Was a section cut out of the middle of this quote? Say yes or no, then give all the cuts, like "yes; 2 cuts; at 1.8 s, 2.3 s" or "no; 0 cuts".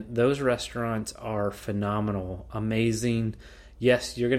no; 0 cuts